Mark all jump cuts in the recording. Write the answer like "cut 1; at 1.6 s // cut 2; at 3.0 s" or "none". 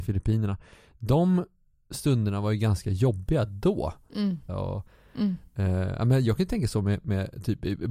cut 1; at 4.5 s